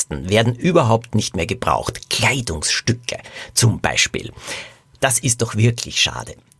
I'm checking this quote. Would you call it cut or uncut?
uncut